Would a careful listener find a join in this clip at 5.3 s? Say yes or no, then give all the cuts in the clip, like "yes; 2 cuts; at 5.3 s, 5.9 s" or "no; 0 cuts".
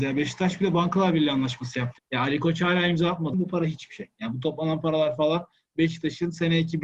no; 2 cuts; at 2.0 s, 3.3 s